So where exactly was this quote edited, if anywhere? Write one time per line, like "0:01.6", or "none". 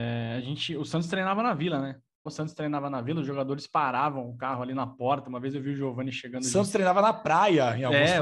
0:02.3